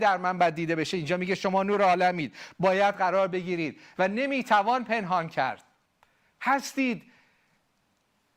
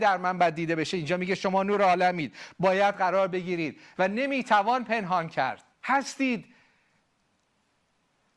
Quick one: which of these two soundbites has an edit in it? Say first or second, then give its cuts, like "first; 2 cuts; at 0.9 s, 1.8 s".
second; 1 cut; at 5.7 s